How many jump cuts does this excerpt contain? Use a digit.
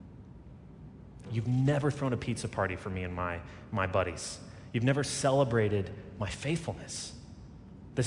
1